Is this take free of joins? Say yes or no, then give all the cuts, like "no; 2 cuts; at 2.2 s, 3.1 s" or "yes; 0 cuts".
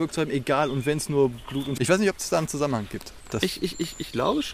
no; 1 cut; at 1.8 s